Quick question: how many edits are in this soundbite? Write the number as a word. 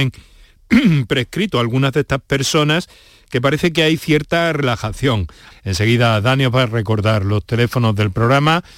one